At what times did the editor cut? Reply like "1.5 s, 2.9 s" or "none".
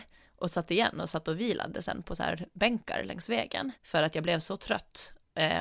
3.8 s